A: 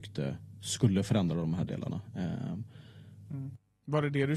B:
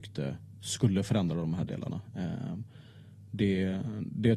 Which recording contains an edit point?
A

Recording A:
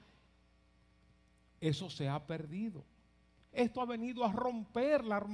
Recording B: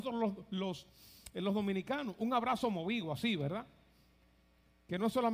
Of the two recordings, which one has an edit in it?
A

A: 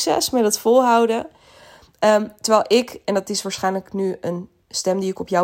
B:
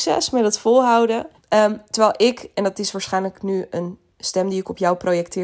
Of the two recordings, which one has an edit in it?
B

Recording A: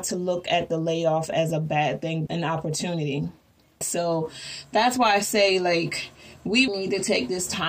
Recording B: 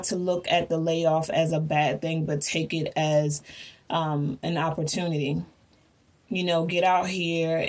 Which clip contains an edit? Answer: A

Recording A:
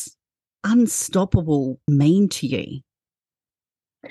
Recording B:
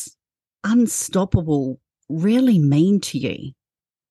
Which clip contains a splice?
A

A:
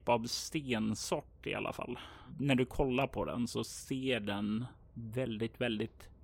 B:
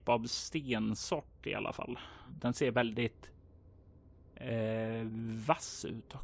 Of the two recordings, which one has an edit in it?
B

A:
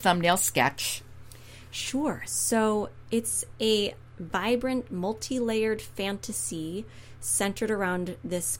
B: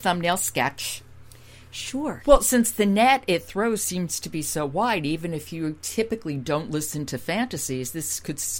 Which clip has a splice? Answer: B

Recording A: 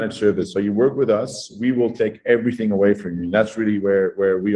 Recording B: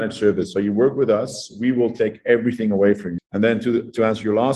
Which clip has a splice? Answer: B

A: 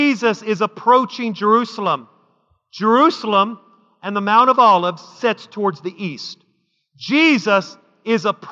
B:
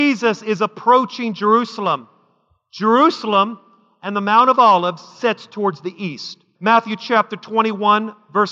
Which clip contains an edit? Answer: B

